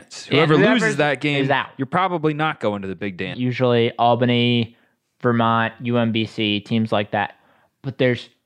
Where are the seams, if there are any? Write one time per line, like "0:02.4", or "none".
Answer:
0:03.3